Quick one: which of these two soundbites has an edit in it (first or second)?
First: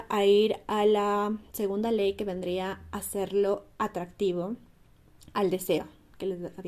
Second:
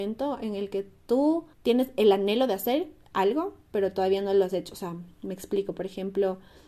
second